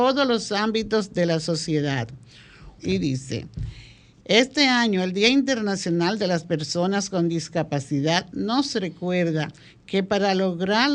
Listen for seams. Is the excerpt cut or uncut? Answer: cut